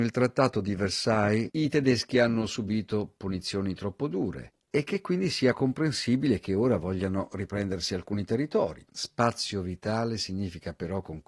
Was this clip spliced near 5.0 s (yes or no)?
no